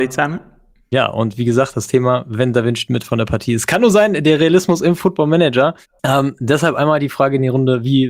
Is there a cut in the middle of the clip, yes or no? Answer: yes